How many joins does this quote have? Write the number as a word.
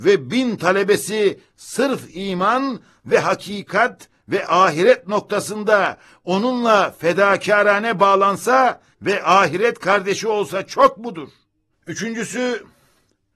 one